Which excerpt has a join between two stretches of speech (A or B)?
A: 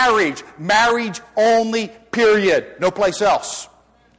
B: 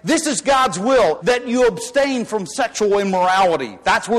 B